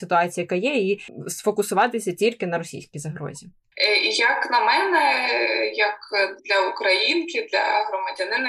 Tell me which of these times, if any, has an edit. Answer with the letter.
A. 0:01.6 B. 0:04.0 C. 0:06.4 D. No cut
C